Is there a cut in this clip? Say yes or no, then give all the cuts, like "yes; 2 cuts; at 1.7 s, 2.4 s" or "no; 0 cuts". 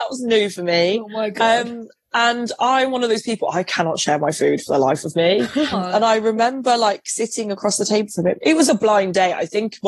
yes; 2 cuts; at 5.7 s, 8.7 s